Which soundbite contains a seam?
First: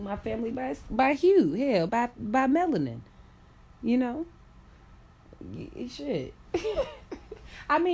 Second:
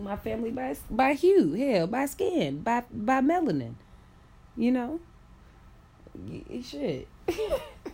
first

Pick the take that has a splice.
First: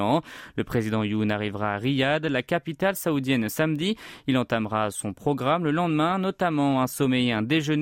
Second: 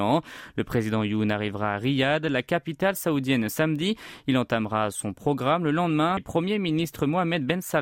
second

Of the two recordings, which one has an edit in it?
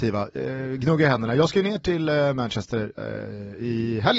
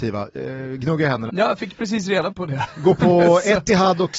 second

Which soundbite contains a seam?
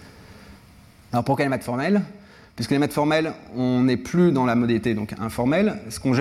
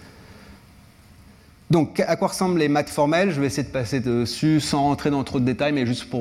first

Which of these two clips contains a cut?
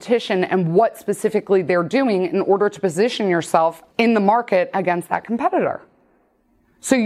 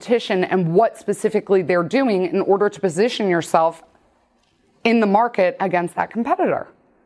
first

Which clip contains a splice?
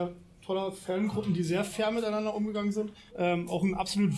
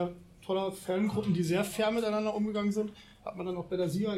first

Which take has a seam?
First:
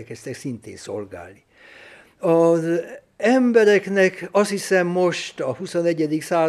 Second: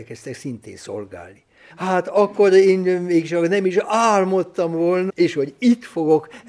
second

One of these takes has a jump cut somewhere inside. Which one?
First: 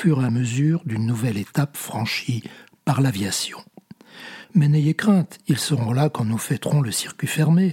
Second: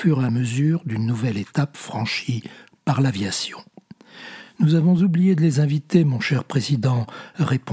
first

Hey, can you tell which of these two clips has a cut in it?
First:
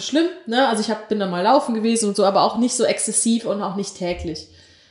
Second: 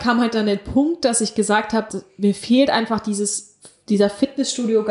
second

